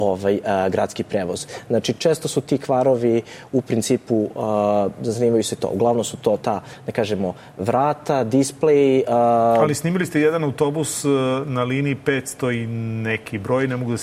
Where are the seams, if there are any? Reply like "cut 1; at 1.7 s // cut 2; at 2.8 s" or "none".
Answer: none

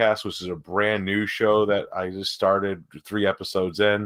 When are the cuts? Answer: none

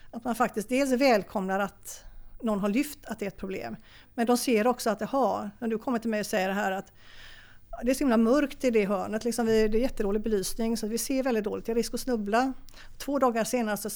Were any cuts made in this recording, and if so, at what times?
none

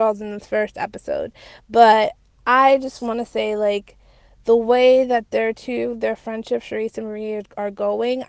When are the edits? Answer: none

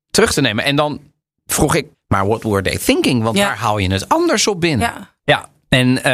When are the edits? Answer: cut 1; at 1.9 s // cut 2; at 5.2 s

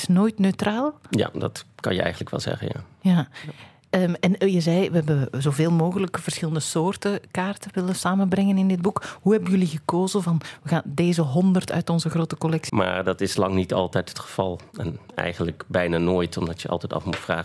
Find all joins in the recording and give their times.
cut 1; at 12.7 s

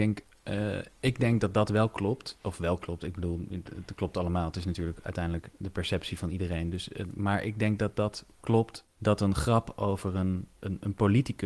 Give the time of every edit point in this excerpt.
none

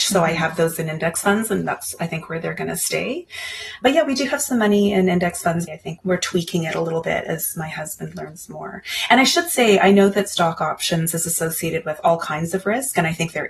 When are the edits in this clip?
cut 1; at 5.7 s

